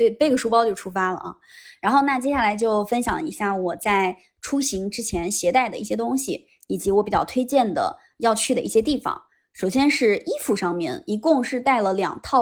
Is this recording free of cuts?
yes; 0 cuts

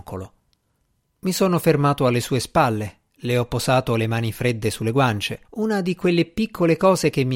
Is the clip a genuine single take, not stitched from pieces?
no; 2 cuts; at 1.0 s, 5.4 s

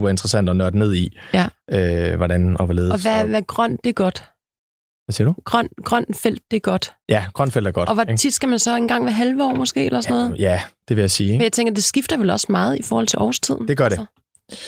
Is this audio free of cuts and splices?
yes; 0 cuts

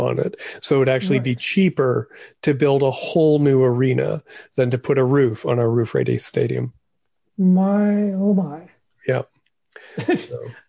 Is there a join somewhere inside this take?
no; 0 cuts

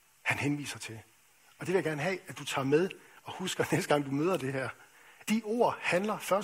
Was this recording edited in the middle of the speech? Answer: yes; 1 cut; at 5.2 s

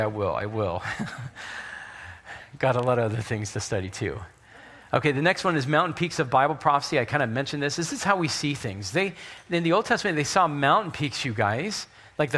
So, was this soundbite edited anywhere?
no; 0 cuts

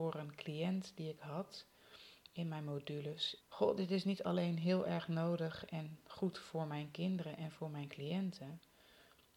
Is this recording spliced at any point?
yes; 1 cut; at 3.4 s

